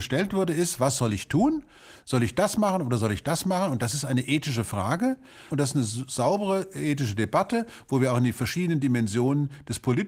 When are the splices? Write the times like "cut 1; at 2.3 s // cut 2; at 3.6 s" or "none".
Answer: cut 1; at 5.5 s